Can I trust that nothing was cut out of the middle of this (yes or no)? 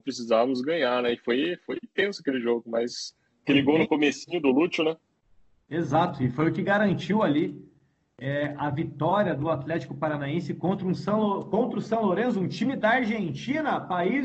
yes